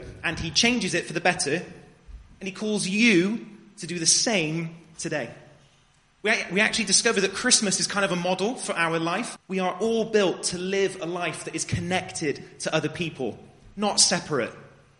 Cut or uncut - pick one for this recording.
cut